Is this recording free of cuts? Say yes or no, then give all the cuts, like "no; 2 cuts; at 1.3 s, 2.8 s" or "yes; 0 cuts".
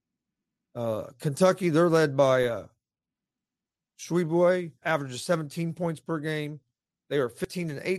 no; 1 cut; at 4.8 s